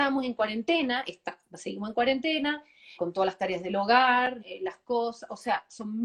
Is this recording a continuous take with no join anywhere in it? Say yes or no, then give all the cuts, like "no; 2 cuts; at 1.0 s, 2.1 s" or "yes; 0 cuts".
no; 2 cuts; at 3.0 s, 4.4 s